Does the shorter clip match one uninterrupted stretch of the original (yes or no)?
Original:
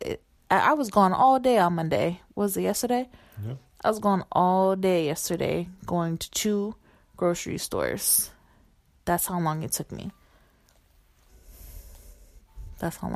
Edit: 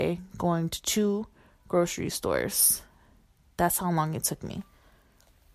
yes